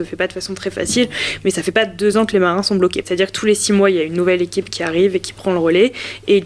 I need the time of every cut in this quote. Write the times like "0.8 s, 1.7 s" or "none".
3.0 s